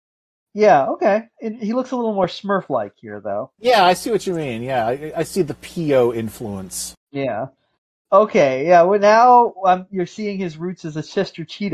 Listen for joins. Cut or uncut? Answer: uncut